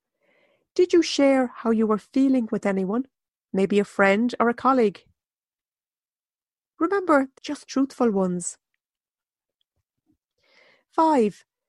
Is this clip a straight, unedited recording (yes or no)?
no